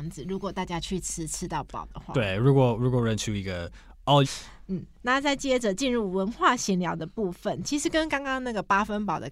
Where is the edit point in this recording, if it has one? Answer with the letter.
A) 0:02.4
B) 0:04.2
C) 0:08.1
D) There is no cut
B